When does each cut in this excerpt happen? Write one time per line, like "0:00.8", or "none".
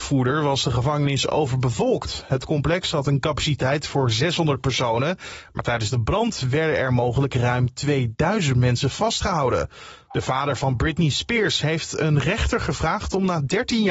0:10.1